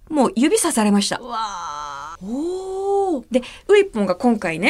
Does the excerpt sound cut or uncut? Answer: cut